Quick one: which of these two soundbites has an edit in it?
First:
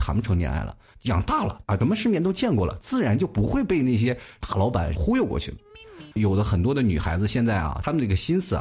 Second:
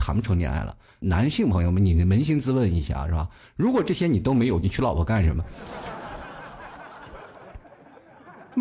first; 2 cuts; at 0.9 s, 6.1 s

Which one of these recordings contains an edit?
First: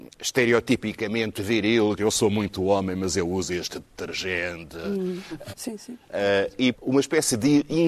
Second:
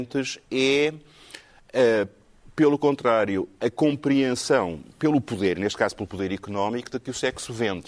first; 3 cuts; at 2.0 s, 5.5 s, 6.7 s

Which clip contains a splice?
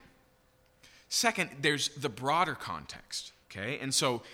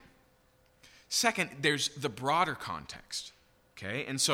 first; 1 cut; at 3.4 s

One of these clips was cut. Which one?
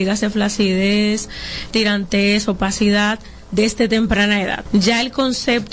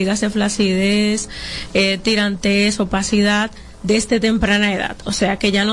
first; 2 cuts; at 1.7 s, 4.7 s

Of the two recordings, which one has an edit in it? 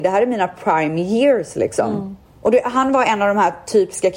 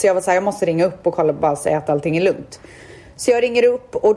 first; 1 cut; at 2.3 s

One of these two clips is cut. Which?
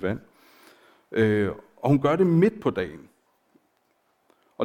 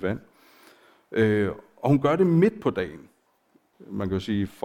second; 1 cut; at 3.7 s

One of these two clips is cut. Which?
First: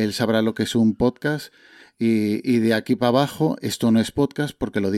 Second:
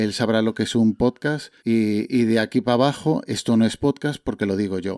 second; 1 cut; at 1.6 s

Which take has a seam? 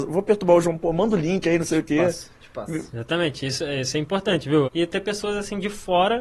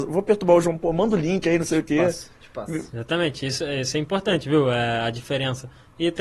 first; 1 cut; at 4.6 s

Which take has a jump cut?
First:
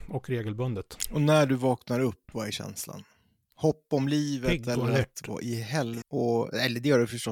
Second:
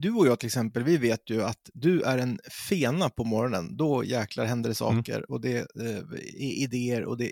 first; 1 cut; at 6.0 s

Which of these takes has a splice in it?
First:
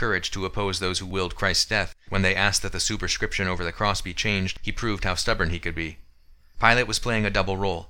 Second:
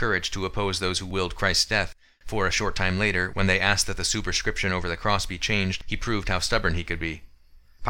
first; 1 cut; at 2.1 s

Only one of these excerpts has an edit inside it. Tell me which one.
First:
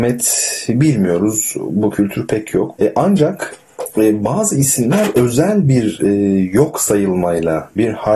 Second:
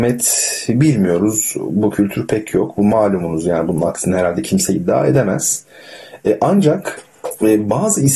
first; 1 cut; at 2.8 s

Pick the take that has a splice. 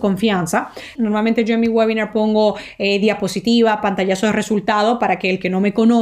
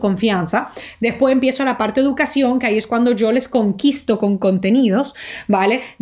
first; 1 cut; at 0.9 s

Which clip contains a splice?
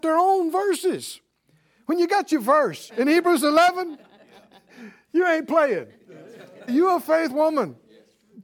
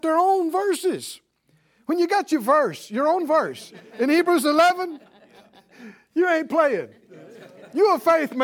first; 2 cuts; at 2.9 s, 6.7 s

